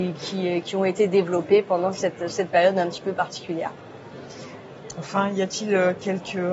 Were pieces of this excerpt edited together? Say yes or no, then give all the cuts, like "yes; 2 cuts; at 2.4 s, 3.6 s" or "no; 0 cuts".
no; 0 cuts